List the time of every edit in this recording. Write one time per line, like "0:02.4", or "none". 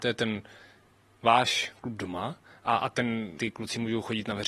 0:03.4